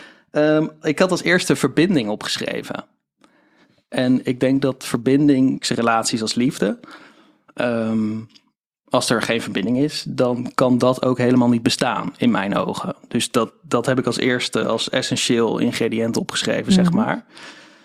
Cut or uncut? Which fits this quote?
cut